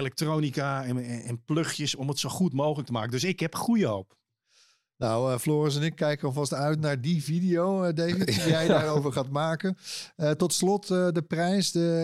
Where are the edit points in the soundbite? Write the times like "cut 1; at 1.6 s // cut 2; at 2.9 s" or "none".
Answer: none